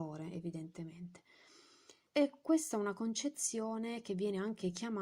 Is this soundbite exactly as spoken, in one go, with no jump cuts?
no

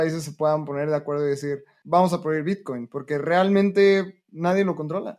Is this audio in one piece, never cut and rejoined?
no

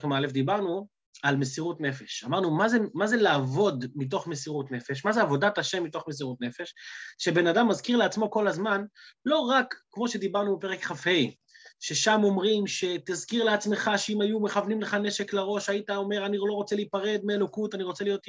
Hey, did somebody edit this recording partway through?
no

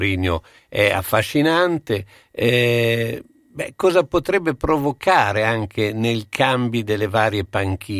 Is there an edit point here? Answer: no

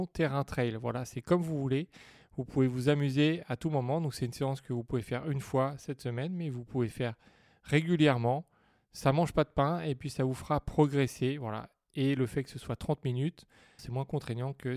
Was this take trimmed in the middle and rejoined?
yes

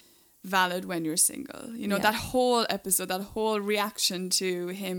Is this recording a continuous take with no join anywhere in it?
yes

